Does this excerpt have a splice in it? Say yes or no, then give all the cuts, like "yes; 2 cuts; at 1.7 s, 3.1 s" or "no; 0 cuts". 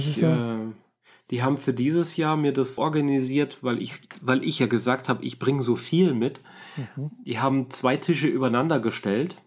yes; 1 cut; at 2.8 s